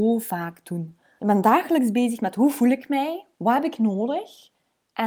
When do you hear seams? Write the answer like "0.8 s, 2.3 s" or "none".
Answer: 1.2 s, 3.3 s